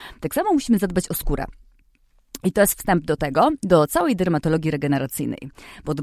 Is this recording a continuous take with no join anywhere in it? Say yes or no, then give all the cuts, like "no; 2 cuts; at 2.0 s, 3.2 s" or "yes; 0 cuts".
yes; 0 cuts